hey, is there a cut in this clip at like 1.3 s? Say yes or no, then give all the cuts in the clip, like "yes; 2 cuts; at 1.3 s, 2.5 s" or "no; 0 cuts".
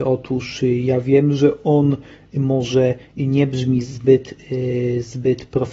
no; 0 cuts